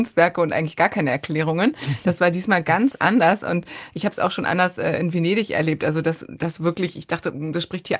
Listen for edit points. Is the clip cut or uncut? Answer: uncut